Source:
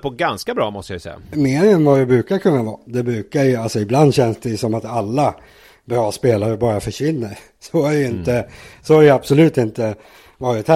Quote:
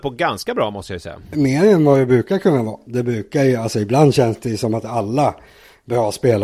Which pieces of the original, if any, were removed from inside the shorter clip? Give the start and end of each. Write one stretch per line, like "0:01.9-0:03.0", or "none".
none